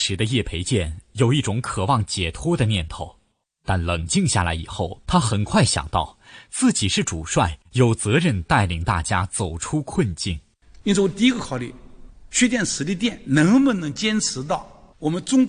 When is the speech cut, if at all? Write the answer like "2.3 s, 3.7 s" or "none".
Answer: 10.8 s